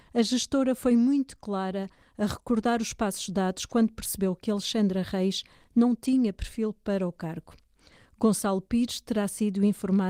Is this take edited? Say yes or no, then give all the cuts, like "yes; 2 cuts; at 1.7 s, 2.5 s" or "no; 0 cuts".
no; 0 cuts